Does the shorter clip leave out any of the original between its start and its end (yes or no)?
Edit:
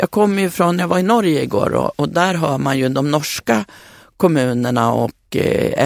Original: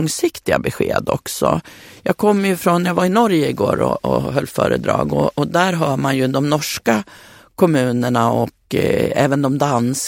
yes